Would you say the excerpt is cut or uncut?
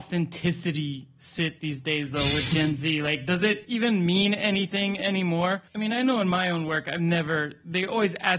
uncut